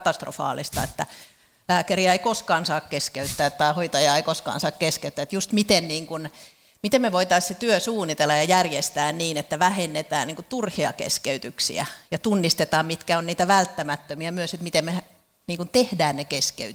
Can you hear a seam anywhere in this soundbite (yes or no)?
no